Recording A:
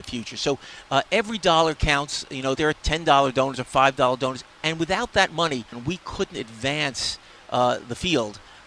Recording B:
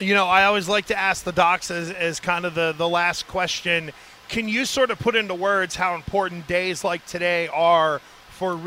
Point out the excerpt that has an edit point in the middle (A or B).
A